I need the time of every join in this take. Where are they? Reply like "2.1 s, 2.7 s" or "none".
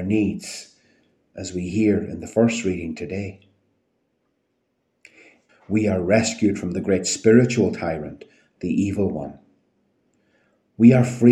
5.5 s